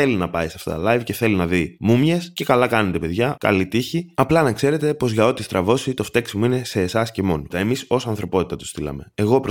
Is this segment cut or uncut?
cut